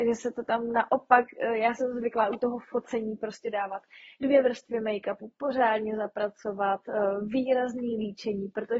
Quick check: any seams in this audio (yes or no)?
no